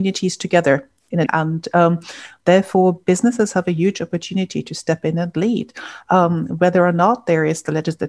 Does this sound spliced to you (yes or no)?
yes